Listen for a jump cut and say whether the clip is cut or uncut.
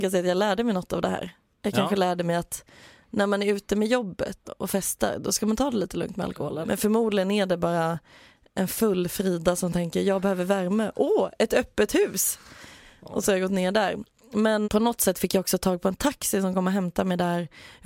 cut